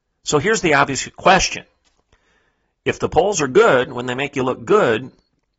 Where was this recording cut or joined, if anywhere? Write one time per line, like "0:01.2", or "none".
none